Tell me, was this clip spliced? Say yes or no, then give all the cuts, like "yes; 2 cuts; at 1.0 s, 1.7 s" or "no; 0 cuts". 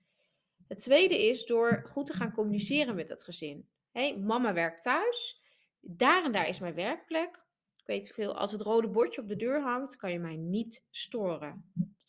no; 0 cuts